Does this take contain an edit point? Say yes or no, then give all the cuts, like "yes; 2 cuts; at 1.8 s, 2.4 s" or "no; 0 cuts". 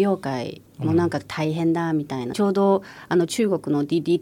yes; 1 cut; at 2.3 s